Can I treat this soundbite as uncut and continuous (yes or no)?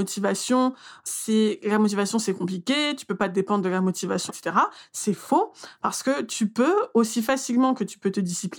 no